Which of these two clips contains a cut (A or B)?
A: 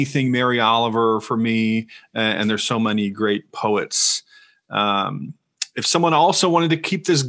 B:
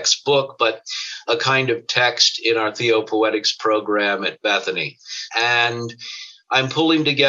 B